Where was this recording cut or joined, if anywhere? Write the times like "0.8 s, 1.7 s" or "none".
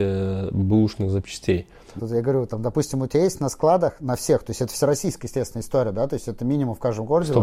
2.0 s